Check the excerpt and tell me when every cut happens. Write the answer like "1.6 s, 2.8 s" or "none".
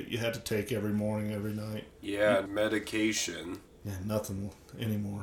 2.5 s